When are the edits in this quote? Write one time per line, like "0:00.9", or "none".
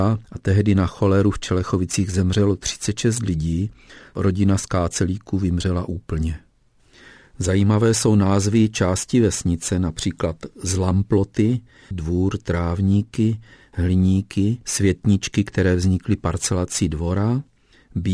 0:11.9